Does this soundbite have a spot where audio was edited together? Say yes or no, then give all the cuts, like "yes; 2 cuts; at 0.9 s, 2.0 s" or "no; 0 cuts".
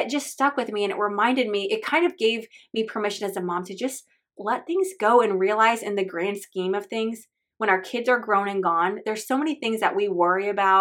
no; 0 cuts